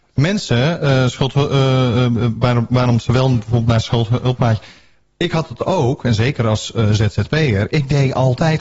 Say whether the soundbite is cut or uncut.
uncut